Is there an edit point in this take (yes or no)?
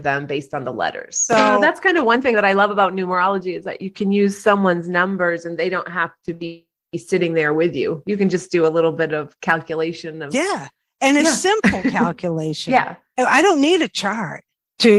yes